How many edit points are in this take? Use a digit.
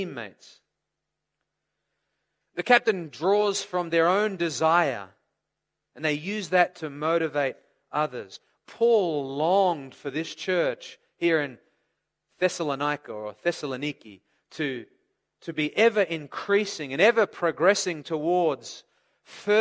1